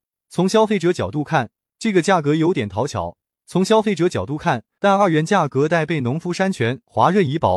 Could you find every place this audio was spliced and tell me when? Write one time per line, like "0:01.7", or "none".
0:03.4
0:04.8